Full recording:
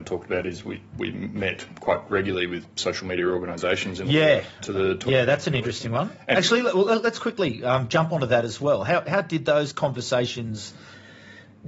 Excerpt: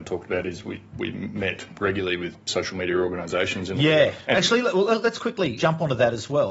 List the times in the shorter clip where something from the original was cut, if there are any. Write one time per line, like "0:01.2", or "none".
0:01.8
0:04.2
0:05.6